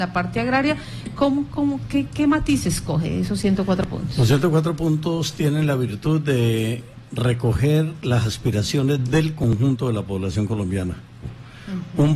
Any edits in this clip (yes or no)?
yes